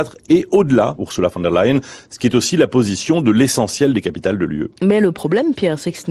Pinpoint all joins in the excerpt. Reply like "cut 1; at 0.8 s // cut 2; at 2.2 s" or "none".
cut 1; at 1.0 s